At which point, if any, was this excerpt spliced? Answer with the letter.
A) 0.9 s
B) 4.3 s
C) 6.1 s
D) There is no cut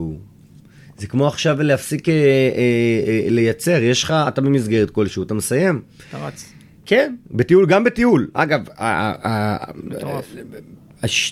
D